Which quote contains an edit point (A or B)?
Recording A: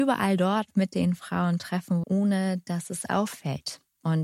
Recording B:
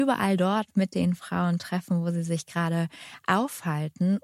A